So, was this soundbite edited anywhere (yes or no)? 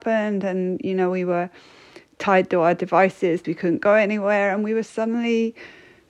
yes